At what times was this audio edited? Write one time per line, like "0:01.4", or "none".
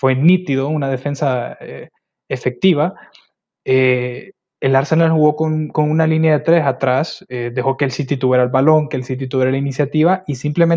0:03.6